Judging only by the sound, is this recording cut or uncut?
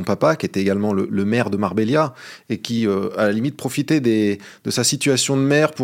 uncut